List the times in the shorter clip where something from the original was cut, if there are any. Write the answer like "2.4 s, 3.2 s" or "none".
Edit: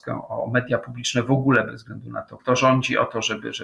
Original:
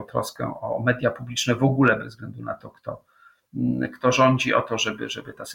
2.4 s